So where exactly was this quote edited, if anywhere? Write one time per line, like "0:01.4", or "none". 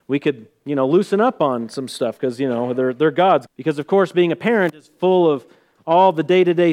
0:03.5